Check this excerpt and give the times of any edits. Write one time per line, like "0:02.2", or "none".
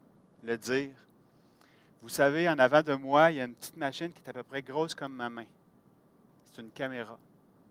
none